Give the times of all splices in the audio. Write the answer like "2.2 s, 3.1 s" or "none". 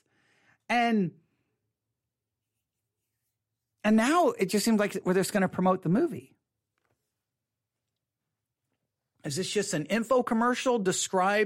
none